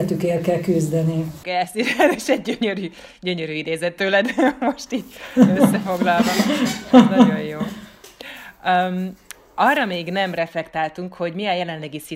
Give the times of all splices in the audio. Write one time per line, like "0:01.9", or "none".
0:01.4